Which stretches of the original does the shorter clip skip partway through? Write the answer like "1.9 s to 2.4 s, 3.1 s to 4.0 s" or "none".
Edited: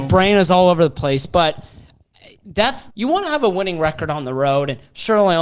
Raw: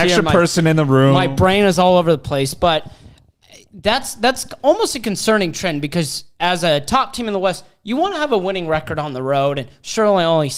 4.2 s to 7.8 s